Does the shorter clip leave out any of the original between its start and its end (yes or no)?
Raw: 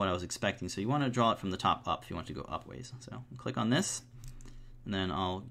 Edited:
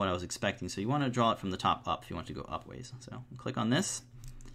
no